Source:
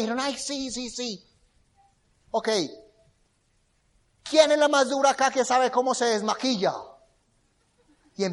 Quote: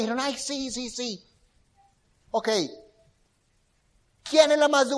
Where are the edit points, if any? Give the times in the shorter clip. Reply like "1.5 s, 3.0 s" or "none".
none